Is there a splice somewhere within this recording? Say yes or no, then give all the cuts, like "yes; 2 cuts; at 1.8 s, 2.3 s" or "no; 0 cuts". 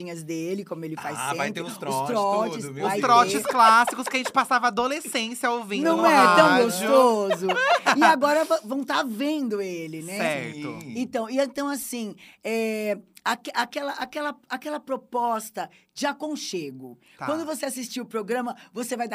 no; 0 cuts